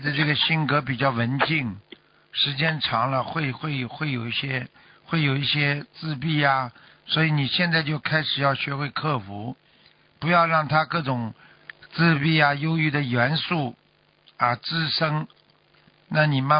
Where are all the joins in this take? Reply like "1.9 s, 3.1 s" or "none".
none